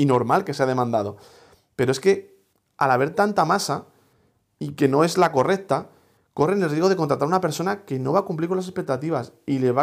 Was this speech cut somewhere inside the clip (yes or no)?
no